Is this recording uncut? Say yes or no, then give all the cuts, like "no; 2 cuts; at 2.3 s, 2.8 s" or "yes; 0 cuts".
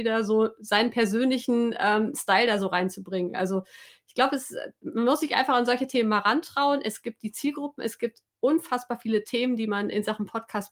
yes; 0 cuts